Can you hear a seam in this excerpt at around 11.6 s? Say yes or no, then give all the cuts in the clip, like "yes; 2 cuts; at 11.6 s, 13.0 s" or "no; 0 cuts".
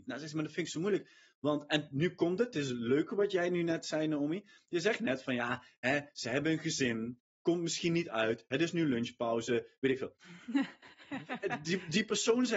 no; 0 cuts